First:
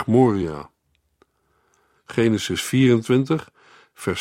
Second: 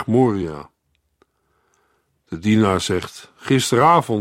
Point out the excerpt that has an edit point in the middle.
first; 1 cut; at 1.9 s

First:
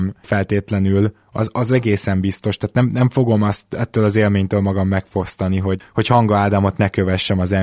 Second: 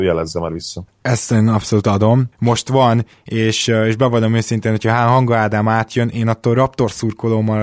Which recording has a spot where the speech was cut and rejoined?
second; 1 cut; at 2.3 s

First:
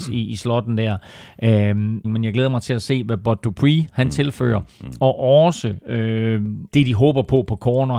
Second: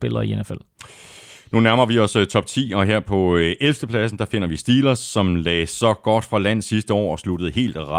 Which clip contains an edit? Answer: first; 2 cuts; at 2.0 s, 6.7 s

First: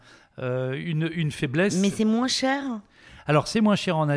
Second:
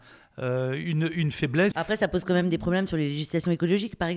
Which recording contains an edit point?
second; 1 cut; at 1.7 s

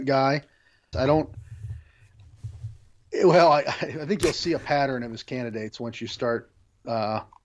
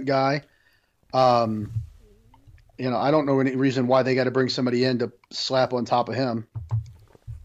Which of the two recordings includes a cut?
first; 1 cut; at 0.9 s

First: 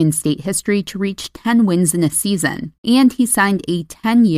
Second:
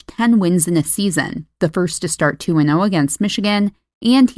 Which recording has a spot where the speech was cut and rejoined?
first; 1 cut; at 2.8 s

